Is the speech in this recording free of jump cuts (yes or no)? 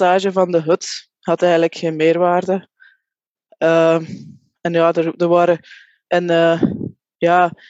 no